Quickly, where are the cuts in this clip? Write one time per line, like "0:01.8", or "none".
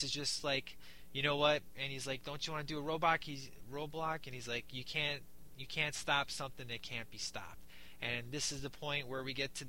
0:01.7